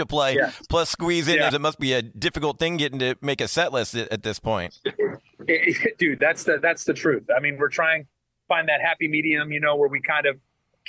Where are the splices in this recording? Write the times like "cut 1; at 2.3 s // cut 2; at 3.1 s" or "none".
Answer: cut 1; at 1.5 s